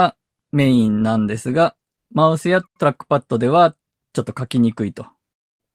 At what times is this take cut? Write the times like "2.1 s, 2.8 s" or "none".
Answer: 2.0 s